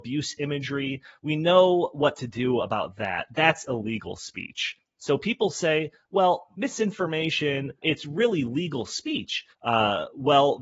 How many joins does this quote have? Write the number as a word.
three